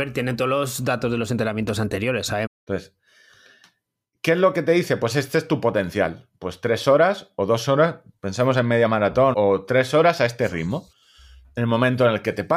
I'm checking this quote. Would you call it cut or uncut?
cut